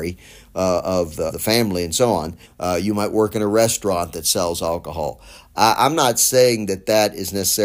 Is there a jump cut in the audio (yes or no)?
yes